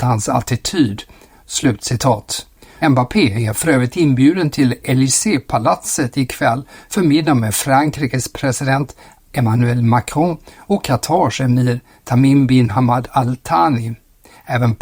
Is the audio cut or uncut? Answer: cut